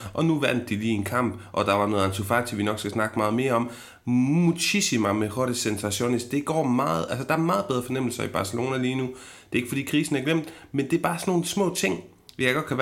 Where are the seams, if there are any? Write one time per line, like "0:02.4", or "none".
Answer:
none